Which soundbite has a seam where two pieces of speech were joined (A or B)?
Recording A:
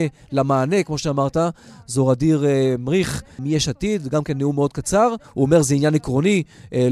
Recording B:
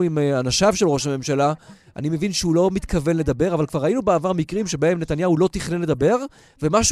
A